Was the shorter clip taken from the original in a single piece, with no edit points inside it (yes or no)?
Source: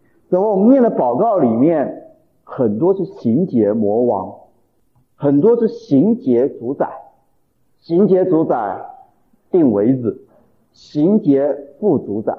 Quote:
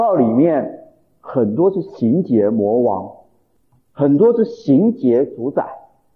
yes